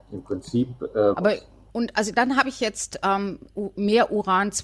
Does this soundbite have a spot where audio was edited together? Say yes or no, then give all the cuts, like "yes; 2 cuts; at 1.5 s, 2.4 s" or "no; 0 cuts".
yes; 1 cut; at 1.1 s